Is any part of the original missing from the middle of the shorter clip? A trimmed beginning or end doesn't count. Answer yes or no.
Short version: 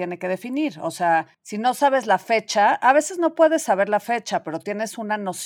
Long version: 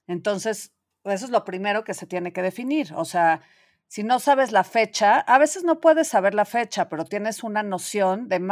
yes